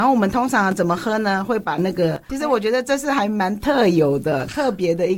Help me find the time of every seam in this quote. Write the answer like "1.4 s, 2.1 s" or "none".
2.3 s